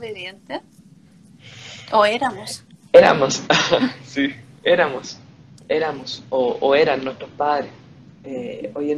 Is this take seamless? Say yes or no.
yes